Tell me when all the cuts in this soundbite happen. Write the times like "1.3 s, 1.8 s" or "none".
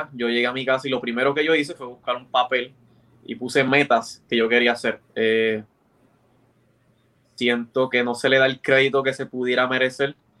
5.0 s